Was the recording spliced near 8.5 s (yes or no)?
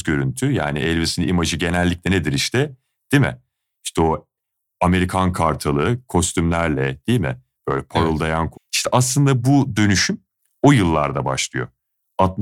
yes